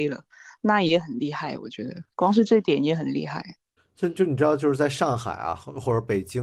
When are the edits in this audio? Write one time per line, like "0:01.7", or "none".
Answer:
none